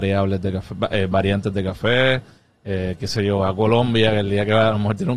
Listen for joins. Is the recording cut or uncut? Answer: uncut